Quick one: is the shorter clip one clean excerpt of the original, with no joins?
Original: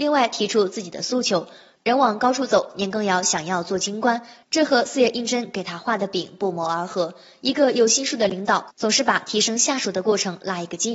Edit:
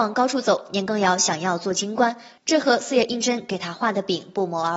yes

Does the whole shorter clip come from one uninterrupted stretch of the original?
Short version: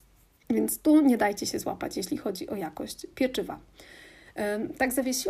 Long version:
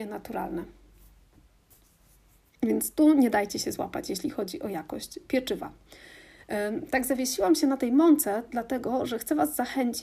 yes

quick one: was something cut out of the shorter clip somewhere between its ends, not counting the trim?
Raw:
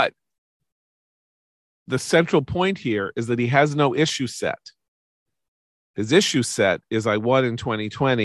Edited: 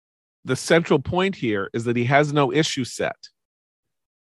no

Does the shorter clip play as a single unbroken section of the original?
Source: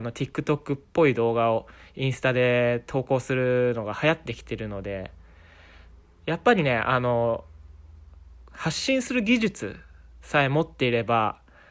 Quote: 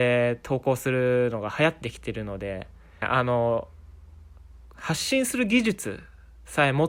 no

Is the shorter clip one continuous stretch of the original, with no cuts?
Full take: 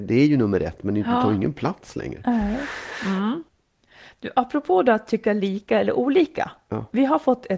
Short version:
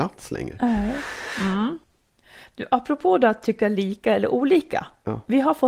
yes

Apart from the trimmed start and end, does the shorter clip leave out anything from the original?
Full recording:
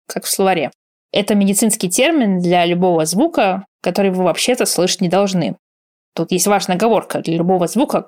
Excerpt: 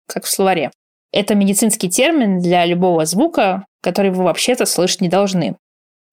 no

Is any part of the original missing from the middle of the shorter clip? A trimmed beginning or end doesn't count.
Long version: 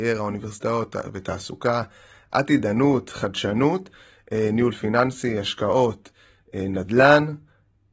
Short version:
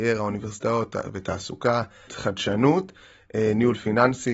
yes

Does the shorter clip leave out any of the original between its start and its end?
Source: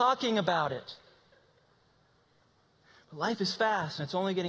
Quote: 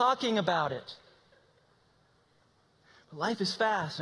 no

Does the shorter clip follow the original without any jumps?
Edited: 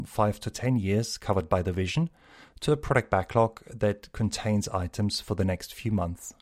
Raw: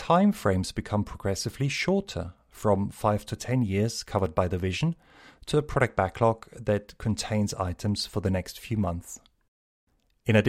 yes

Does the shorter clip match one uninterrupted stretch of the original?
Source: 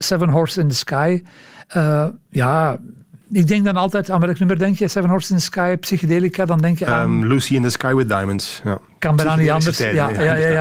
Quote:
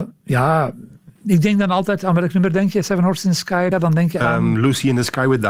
no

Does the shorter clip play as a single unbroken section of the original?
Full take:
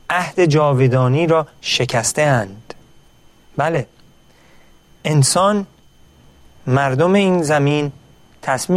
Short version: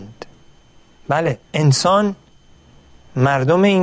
no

